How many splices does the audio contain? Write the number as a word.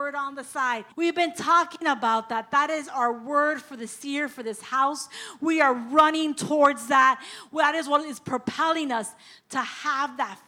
one